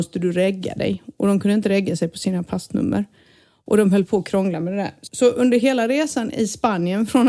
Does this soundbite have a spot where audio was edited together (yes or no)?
yes